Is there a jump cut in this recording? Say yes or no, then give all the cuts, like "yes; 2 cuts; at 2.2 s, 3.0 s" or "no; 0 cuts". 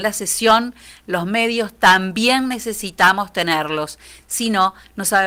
no; 0 cuts